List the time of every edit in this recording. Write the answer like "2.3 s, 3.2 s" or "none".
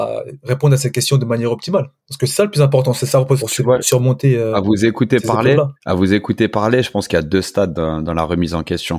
3.4 s, 5.8 s